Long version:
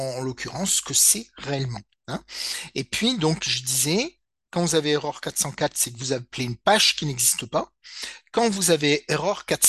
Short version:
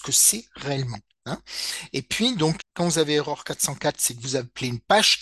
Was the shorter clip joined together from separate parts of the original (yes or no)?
yes